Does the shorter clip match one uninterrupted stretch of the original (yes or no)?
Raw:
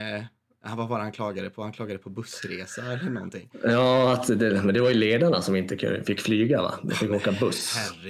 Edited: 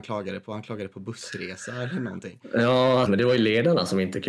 no